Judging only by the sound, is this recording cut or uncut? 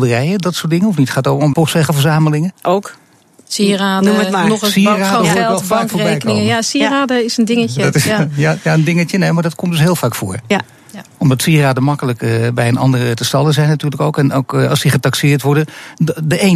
cut